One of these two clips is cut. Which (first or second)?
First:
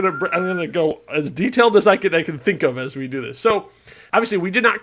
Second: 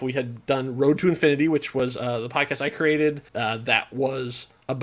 second